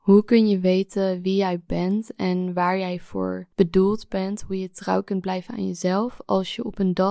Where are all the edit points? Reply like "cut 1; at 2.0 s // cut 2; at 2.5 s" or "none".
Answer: cut 1; at 3.5 s